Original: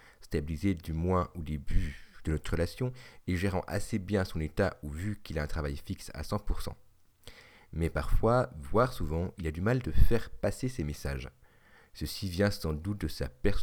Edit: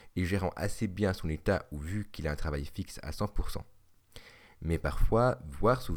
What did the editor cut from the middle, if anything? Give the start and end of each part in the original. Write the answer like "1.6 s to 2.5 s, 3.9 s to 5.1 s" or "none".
none